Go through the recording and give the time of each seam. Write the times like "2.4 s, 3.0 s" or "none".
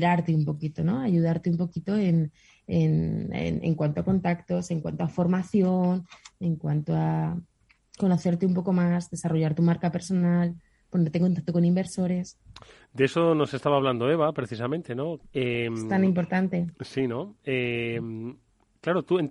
15.2 s